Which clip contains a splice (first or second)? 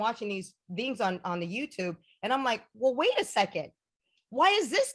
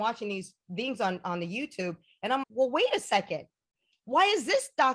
second